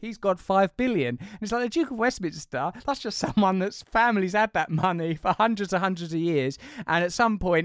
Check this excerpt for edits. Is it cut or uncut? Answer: uncut